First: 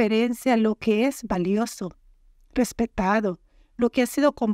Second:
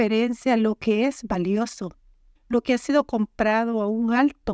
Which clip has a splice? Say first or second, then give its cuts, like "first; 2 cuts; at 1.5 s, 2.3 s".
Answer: second; 1 cut; at 2.4 s